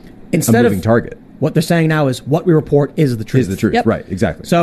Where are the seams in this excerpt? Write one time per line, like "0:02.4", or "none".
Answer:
0:01.2